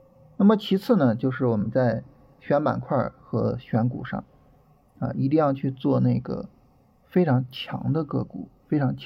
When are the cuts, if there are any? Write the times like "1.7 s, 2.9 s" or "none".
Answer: none